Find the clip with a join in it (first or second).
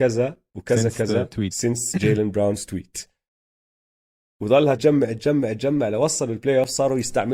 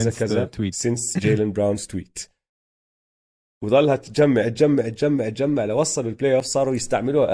first